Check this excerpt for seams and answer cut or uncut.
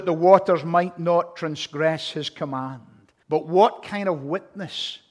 cut